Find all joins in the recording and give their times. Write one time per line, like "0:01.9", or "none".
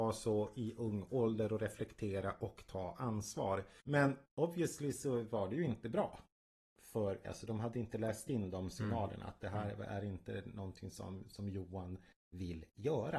0:07.2